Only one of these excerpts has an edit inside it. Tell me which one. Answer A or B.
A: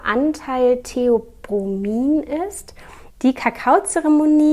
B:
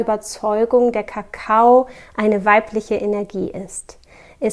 A